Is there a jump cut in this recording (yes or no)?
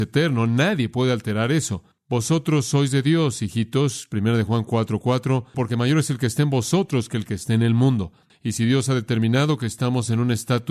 yes